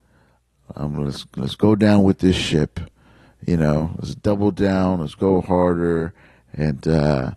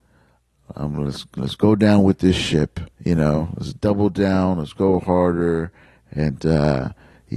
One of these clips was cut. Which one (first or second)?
second